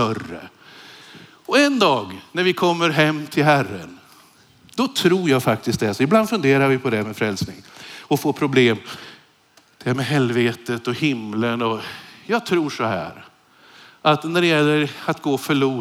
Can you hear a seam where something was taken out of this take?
no; 0 cuts

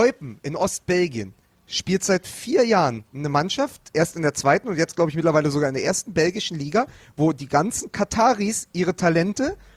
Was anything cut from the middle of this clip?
yes; 1 cut; at 3.9 s

